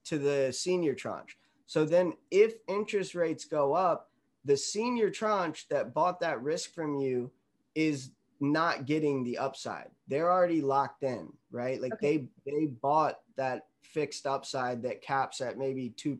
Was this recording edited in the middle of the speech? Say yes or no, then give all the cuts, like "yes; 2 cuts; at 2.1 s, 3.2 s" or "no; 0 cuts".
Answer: no; 0 cuts